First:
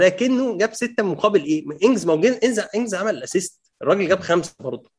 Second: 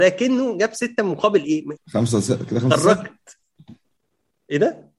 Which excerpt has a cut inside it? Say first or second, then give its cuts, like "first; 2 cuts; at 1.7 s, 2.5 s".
second; 1 cut; at 1.8 s